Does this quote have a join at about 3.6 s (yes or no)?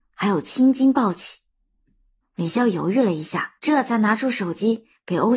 yes